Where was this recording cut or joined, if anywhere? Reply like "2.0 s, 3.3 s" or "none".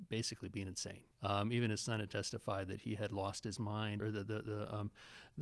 1.1 s, 4.0 s